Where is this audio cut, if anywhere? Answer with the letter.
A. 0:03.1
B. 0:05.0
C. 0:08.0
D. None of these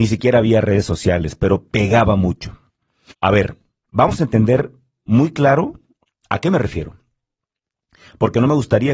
A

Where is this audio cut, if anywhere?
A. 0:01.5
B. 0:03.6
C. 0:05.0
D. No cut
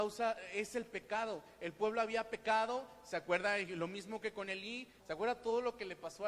C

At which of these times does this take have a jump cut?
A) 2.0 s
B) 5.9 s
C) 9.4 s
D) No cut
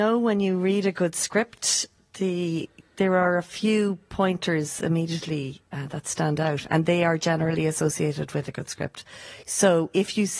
D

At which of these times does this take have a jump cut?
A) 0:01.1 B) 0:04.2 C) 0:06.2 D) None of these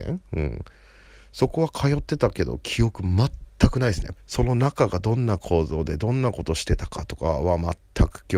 B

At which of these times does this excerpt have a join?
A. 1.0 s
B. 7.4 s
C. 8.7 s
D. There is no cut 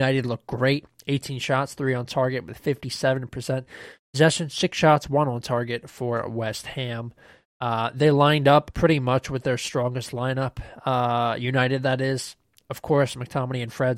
C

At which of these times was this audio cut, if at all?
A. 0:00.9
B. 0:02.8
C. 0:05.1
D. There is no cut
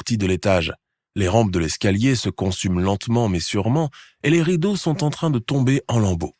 D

